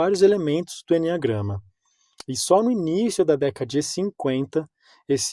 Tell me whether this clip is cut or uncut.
uncut